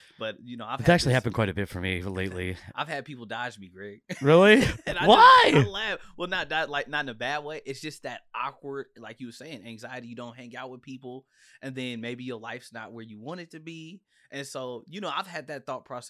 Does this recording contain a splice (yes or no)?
no